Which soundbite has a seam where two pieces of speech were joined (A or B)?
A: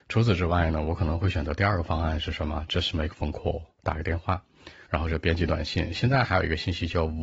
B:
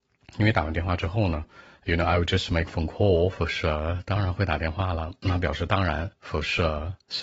A